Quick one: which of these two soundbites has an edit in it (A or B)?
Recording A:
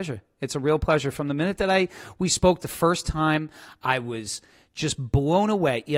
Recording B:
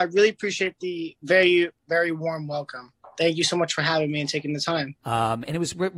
B